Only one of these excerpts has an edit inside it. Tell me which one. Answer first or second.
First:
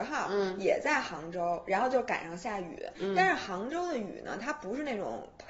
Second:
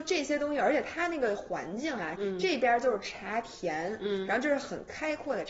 second